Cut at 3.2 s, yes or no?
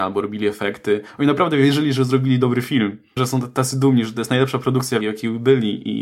yes